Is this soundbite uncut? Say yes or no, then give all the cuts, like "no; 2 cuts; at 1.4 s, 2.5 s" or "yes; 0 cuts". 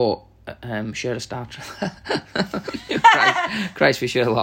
yes; 0 cuts